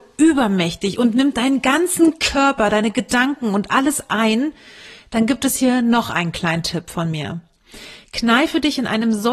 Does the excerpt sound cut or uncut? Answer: uncut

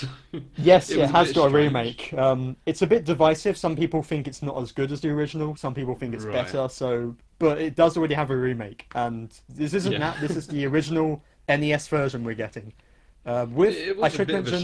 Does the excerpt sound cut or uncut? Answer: uncut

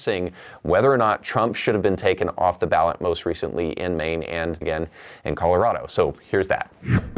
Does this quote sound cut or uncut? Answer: cut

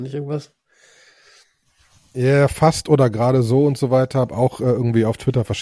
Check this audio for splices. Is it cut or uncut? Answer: uncut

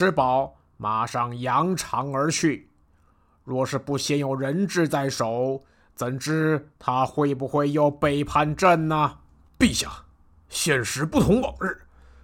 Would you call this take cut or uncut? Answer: uncut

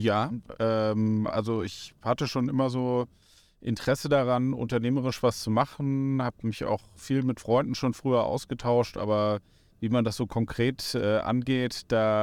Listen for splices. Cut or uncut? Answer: uncut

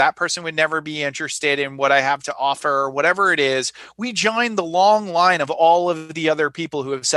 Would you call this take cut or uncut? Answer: uncut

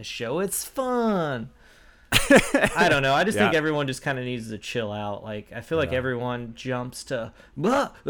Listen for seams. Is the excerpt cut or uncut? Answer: uncut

